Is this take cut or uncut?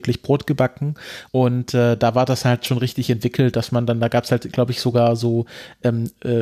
cut